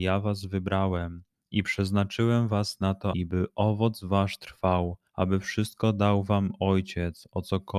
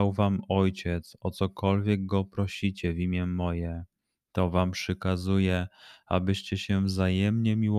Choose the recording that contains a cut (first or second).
first